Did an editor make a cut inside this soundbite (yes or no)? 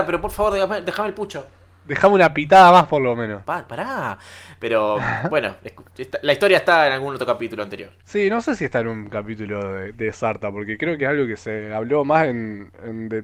yes